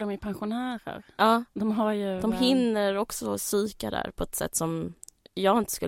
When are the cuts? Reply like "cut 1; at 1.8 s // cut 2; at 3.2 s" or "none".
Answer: none